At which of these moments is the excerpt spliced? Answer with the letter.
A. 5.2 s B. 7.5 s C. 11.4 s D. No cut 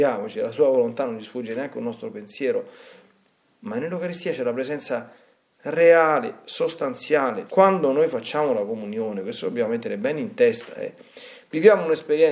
B